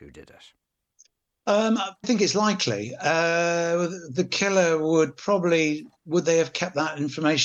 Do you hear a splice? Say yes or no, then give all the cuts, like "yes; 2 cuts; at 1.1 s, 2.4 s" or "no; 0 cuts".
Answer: yes; 2 cuts; at 2.0 s, 6.0 s